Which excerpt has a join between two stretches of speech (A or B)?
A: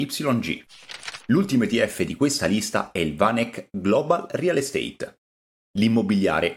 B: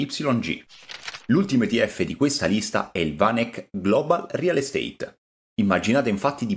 B